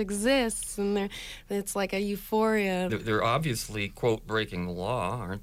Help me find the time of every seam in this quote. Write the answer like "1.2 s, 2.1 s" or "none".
2.9 s